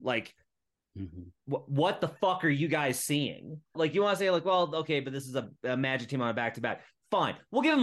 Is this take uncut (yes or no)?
no